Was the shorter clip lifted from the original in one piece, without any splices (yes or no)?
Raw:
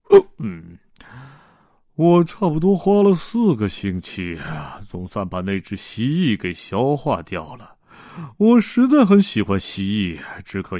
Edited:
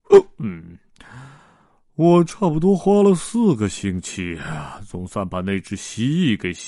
yes